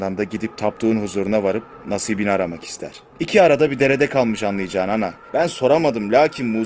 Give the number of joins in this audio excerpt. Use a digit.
2